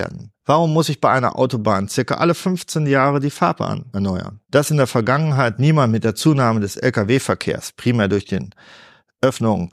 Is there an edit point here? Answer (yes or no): no